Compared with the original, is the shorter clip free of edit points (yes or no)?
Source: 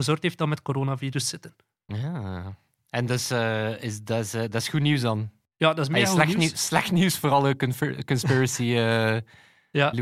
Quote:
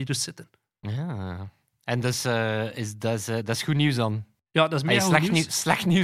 yes